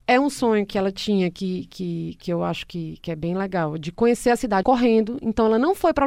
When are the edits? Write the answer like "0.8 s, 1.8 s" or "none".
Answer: 4.6 s